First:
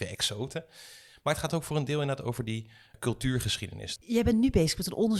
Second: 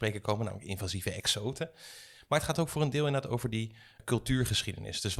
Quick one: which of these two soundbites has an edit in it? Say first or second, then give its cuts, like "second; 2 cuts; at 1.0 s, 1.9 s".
first; 1 cut; at 4.0 s